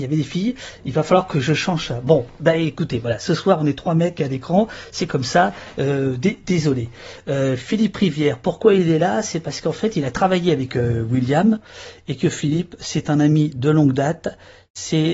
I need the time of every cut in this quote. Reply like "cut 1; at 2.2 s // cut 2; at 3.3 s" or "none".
none